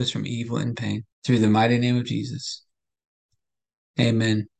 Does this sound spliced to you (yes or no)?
yes